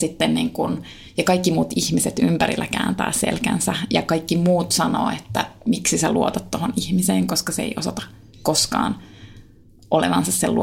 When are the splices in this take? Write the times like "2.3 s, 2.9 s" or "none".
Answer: none